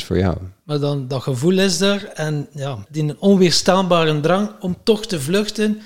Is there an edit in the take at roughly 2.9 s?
yes; 1 cut; at 2.9 s

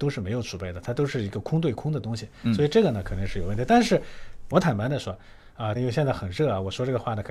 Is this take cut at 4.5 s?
yes; 2 cuts; at 4.5 s, 5.7 s

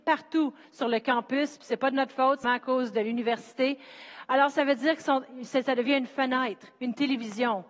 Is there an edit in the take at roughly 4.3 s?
no; 1 cut; at 2.4 s

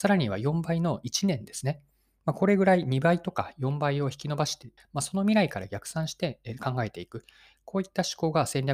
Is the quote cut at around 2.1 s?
no; 1 cut; at 4.8 s

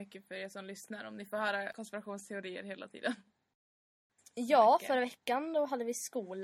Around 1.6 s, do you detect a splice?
no; 1 cut; at 4.2 s

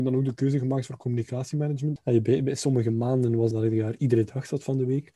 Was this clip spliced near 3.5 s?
yes; 2 cuts; at 2.0 s, 3.5 s

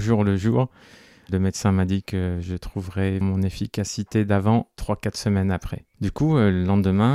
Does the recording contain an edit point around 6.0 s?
yes; 2 cuts; at 3.2 s, 6.0 s

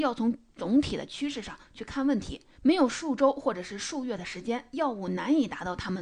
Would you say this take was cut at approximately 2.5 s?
yes; 1 cut; at 2.5 s

